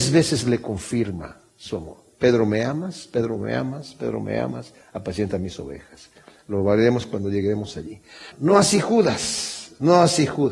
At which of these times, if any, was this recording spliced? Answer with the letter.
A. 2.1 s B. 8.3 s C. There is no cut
B